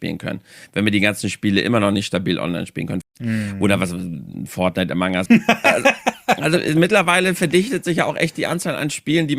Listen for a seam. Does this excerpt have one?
yes; 2 cuts; at 3.0 s, 5.3 s

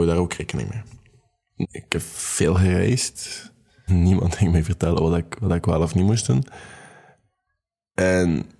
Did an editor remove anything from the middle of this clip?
yes; 2 cuts; at 1.6 s, 3.9 s

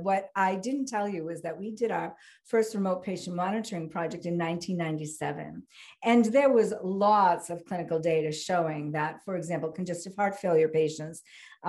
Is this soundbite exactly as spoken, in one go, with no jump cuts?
yes; 0 cuts

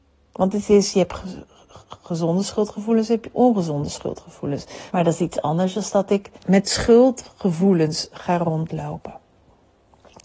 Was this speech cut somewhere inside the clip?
yes; 2 cuts; at 4.9 s, 6.4 s

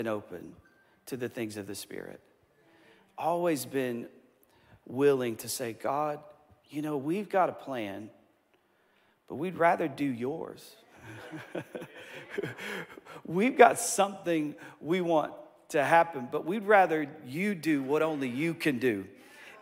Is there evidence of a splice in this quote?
no; 0 cuts

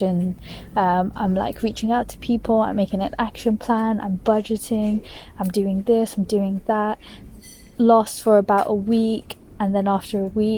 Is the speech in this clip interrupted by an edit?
no; 0 cuts

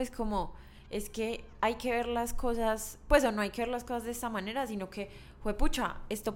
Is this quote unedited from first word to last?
yes; 0 cuts

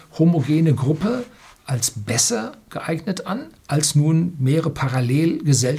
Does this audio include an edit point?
yes; 1 cut; at 3.6 s

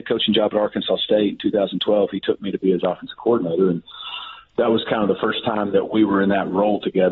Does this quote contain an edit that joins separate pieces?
no; 0 cuts

